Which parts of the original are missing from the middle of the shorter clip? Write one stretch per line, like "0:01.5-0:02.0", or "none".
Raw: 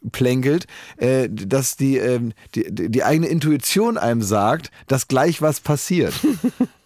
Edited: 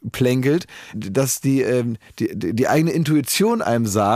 0:00.9-0:01.3

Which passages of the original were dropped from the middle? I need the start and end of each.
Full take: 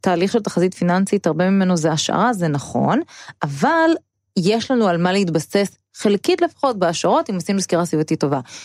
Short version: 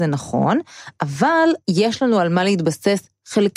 0:04.0-0:04.3

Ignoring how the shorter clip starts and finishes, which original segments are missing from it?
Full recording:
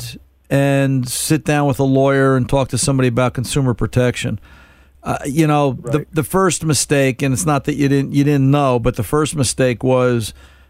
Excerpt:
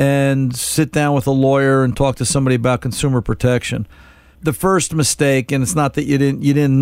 0:04.9-0:06.1

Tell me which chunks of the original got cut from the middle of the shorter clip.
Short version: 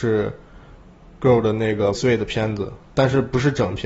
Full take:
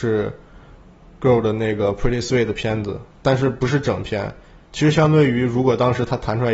0:01.9-0:02.2

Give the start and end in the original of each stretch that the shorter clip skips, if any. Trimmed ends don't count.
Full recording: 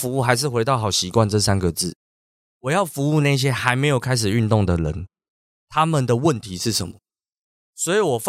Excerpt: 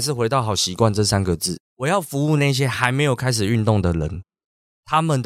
0:02.0-0:02.5

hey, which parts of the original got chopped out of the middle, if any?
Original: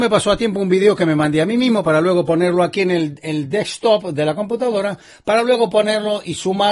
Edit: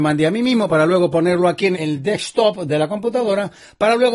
0:02.9-0:03.2

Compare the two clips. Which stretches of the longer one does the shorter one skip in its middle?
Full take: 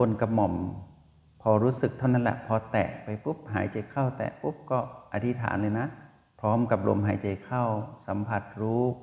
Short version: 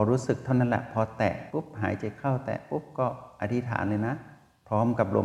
0:03.0-0:03.2

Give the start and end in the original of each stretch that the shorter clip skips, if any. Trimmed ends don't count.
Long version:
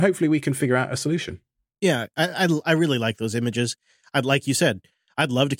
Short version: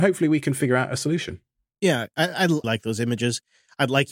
0:02.6-0:03.0

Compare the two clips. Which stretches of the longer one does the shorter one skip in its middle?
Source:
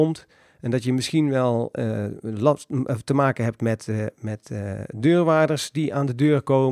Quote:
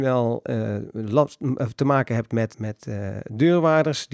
0:03.8-0:04.1

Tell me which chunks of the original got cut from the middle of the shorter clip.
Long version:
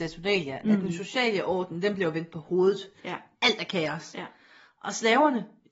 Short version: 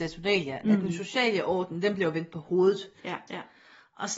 0:03.3-0:04.1

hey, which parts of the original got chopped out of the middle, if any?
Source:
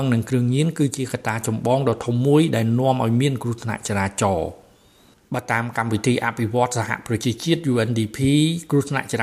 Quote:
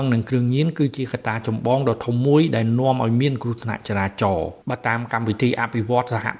0:04.6-0:05.3

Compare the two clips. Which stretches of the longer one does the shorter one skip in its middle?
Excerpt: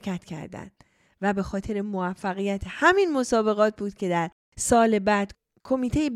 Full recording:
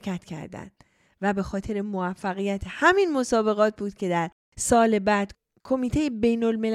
none

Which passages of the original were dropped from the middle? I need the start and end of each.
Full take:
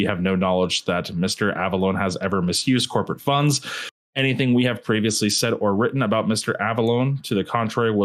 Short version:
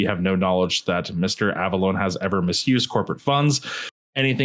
none

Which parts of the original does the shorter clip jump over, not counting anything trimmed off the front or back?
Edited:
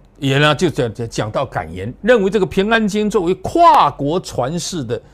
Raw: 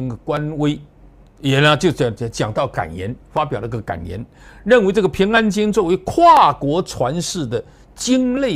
0:03.2-0:04.6

